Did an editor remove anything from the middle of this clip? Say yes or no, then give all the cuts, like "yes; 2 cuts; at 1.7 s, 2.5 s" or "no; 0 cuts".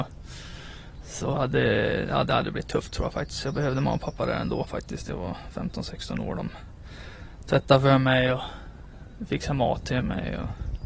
no; 0 cuts